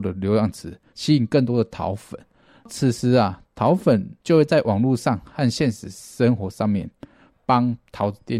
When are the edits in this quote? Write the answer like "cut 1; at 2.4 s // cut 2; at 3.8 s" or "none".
cut 1; at 0.9 s // cut 2; at 4.2 s